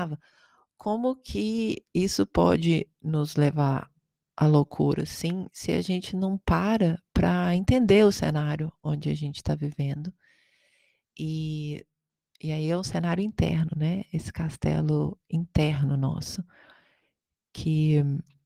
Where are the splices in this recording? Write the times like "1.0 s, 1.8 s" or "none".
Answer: none